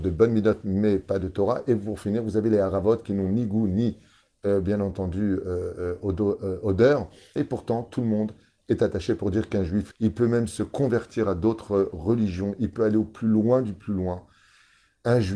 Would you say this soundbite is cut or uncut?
cut